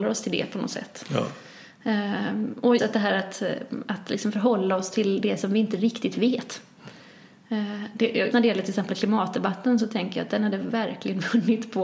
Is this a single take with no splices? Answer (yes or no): no